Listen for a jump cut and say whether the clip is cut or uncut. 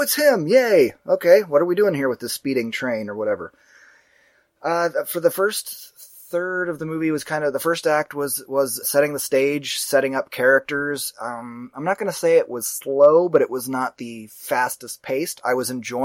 cut